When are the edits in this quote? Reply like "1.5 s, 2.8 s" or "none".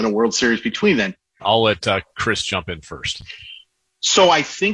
1.4 s